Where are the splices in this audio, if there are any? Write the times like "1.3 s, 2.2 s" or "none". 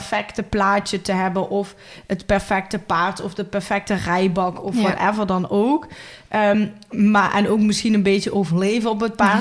none